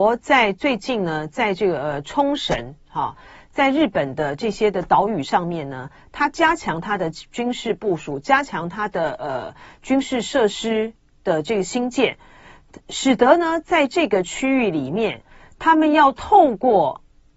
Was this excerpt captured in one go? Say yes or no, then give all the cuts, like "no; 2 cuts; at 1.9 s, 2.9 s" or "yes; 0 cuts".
yes; 0 cuts